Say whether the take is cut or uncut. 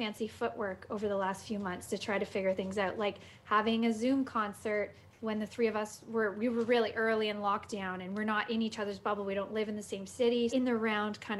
cut